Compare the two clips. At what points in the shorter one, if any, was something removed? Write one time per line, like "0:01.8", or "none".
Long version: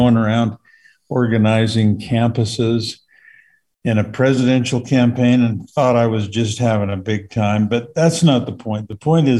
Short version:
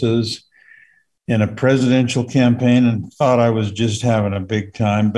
none